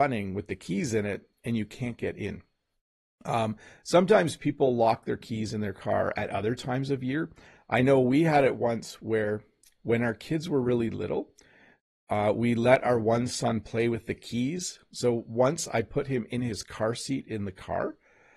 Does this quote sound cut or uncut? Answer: uncut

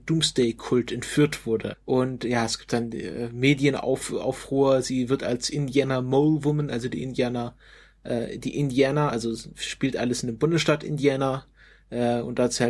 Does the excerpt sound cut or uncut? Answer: cut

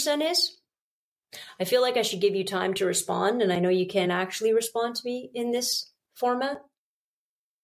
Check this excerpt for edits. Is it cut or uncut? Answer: uncut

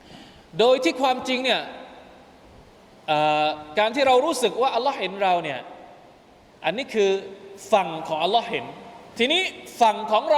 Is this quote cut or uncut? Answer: cut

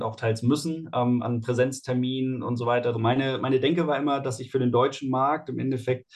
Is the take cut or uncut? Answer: cut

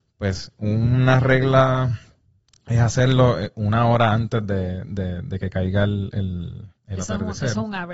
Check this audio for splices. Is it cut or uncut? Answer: cut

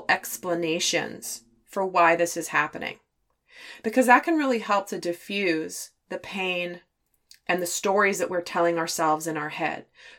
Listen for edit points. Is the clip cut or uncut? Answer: uncut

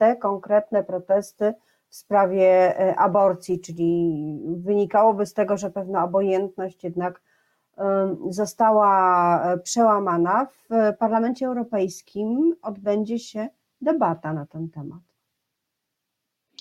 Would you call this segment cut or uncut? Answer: uncut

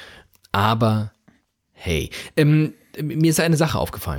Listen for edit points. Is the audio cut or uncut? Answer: cut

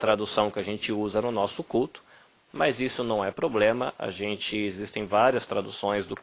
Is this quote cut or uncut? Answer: uncut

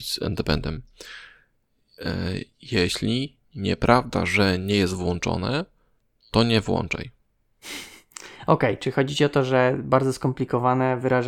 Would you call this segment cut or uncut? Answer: uncut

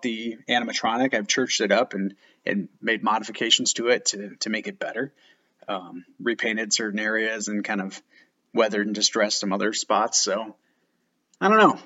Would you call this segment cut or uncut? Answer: uncut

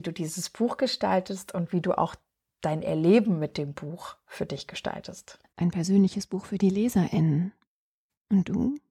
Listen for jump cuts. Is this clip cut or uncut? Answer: uncut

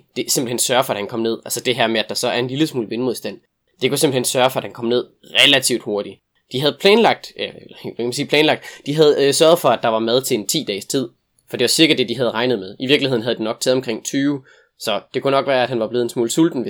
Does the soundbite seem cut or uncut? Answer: uncut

